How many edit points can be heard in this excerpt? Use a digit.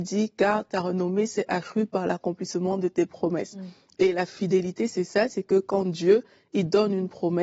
0